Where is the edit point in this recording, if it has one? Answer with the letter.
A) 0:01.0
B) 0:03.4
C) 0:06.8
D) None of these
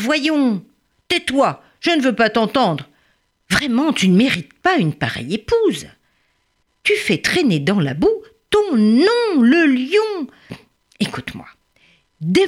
B